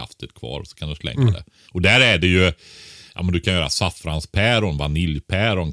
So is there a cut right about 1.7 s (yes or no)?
yes